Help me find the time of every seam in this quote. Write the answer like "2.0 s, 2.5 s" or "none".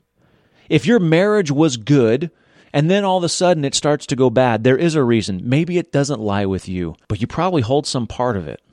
none